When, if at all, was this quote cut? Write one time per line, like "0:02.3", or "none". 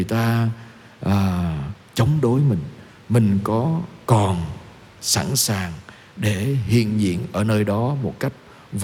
none